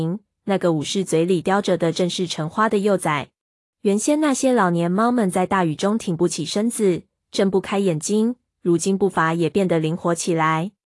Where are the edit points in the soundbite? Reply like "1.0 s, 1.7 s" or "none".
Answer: 3.7 s